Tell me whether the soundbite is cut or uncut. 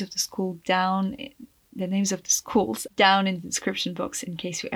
cut